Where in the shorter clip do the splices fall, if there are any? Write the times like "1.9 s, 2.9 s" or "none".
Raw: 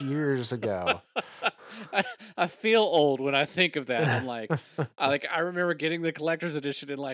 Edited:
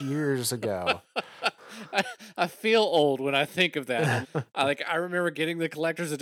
4.2 s